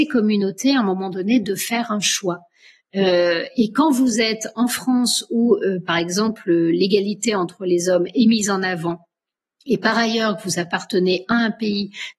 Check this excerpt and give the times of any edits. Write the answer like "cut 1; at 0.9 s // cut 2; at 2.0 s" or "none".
none